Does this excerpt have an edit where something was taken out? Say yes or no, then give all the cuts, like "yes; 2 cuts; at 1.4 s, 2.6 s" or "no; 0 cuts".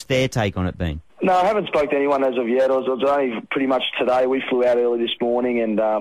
yes; 1 cut; at 1.1 s